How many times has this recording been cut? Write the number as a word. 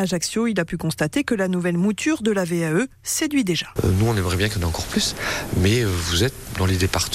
one